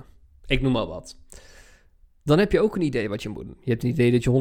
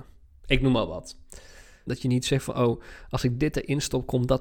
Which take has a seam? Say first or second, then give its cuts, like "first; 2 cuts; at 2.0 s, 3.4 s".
second; 1 cut; at 1.9 s